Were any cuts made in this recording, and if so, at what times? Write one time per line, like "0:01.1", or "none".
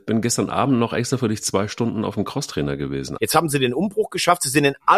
0:03.2